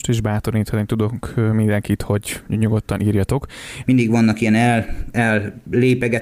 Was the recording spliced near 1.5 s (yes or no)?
no